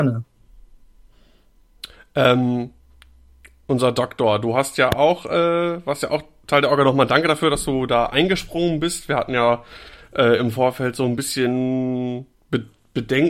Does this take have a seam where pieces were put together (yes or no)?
no